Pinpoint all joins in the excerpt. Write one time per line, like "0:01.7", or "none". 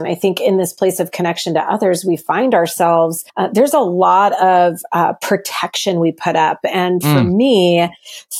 none